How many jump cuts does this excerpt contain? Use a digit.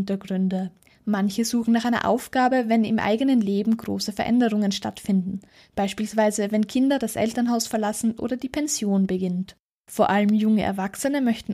0